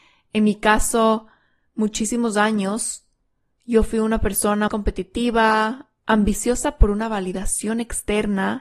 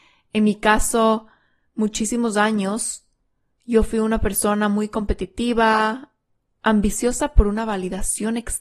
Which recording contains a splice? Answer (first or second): first